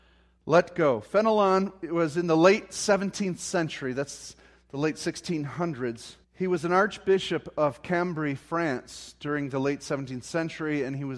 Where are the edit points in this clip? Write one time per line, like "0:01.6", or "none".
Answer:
0:06.2